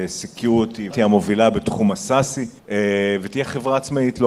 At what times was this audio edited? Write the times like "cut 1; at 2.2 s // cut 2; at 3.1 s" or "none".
cut 1; at 0.9 s // cut 2; at 2.6 s